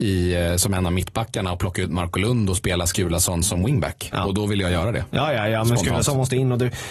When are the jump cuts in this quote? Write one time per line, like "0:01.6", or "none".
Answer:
0:04.1